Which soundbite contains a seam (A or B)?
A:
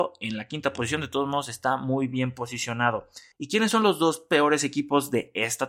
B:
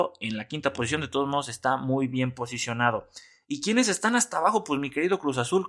A